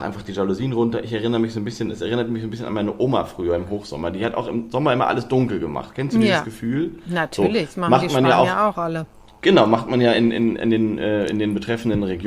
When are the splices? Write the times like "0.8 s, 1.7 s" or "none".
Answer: none